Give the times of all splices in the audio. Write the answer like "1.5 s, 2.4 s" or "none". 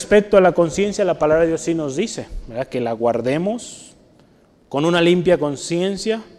none